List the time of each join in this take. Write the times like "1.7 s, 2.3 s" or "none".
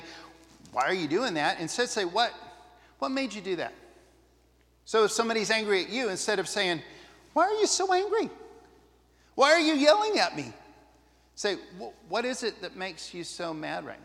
none